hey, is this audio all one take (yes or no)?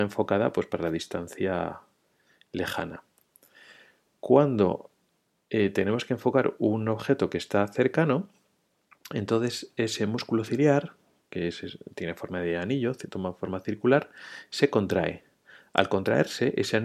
yes